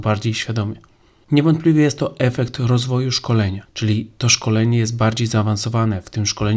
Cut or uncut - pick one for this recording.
cut